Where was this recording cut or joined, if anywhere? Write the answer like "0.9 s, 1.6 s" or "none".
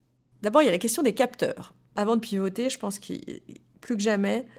none